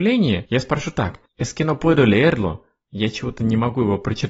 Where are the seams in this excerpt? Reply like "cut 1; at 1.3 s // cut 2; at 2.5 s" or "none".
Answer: cut 1; at 1.3 s